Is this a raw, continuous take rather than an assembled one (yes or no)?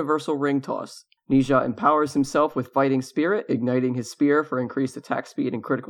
no